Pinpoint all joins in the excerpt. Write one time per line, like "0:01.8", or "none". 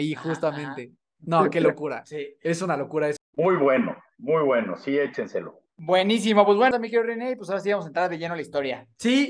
0:03.2
0:06.7